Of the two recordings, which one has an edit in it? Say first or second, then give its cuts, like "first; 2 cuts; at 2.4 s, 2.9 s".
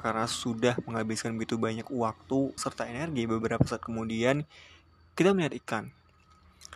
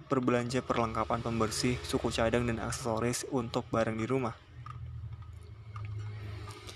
first; 1 cut; at 2.6 s